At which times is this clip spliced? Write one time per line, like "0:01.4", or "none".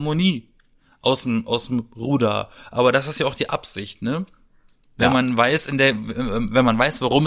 none